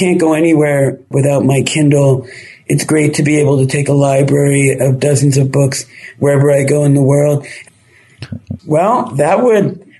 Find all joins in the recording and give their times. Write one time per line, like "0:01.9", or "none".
0:08.6